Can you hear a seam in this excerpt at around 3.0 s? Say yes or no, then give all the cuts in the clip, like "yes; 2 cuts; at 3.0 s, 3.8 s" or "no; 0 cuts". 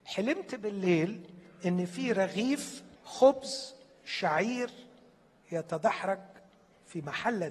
yes; 1 cut; at 3.0 s